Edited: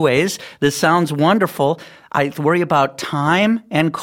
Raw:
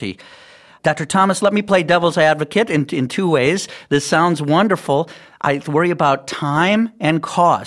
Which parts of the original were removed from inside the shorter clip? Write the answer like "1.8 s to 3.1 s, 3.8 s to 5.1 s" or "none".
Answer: none